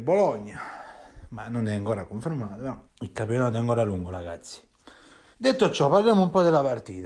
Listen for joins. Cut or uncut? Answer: cut